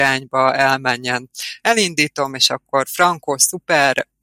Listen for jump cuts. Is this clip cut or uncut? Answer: cut